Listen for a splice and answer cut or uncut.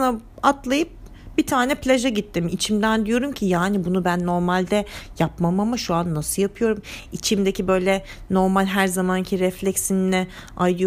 uncut